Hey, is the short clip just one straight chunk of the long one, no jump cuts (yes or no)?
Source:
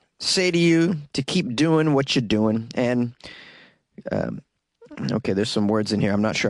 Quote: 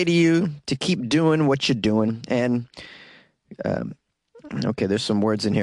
yes